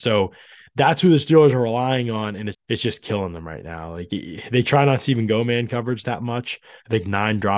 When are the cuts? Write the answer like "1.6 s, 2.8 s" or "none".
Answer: 2.5 s